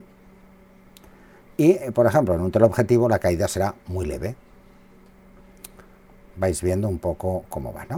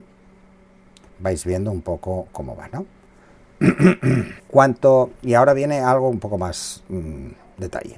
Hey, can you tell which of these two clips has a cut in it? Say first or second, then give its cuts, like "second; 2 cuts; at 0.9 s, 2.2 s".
second; 2 cuts; at 1.1 s, 4.4 s